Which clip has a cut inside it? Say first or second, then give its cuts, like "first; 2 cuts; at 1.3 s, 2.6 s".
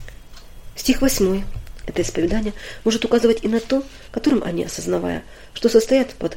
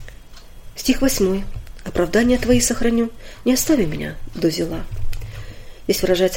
first; 2 cuts; at 1.8 s, 4.1 s